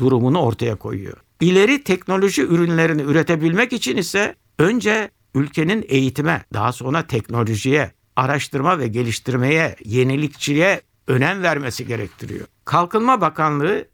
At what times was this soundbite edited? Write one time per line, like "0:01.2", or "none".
0:01.3
0:06.4
0:12.6